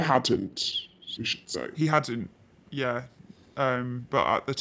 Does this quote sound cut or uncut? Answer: uncut